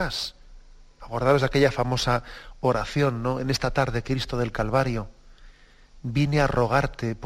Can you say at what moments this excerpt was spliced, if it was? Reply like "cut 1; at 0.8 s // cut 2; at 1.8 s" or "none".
cut 1; at 1.0 s